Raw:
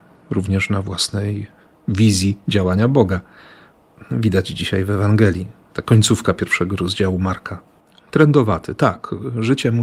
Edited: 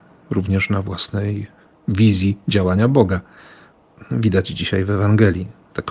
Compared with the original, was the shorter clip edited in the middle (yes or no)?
no